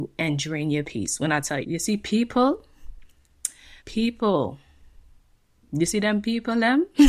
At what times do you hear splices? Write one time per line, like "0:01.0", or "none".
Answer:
0:01.6
0:03.8